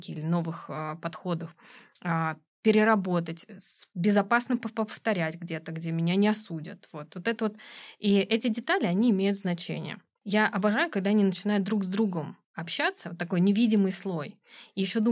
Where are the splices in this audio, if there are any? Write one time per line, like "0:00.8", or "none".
0:10.2